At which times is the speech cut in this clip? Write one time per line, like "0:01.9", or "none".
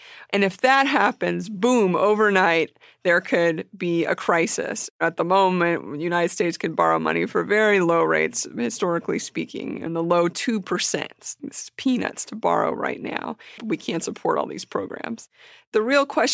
0:09.9
0:11.4
0:13.6